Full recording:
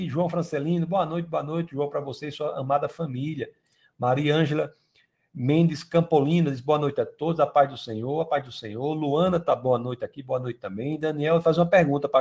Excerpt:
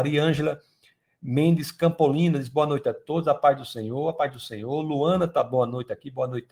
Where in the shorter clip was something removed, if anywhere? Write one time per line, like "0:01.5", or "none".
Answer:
none